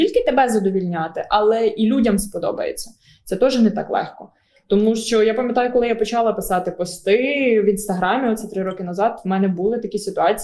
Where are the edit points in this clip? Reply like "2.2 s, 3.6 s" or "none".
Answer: none